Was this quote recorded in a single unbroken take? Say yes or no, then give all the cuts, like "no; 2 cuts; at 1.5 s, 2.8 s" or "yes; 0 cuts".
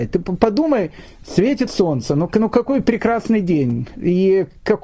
yes; 0 cuts